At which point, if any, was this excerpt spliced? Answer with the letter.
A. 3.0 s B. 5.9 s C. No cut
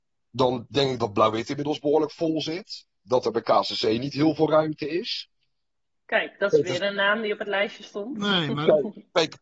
B